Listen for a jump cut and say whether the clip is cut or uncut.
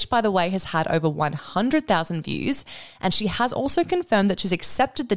uncut